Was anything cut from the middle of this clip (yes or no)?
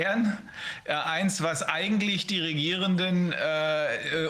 no